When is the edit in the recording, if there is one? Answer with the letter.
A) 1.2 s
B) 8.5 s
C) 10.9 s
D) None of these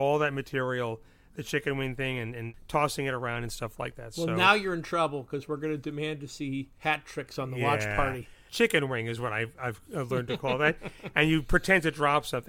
B